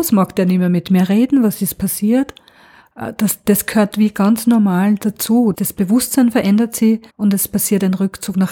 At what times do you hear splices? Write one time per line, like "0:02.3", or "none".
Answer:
0:05.5
0:07.1